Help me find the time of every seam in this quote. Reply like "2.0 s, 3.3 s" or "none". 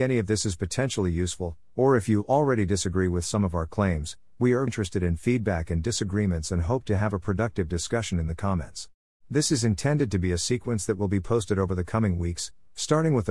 4.7 s, 9.2 s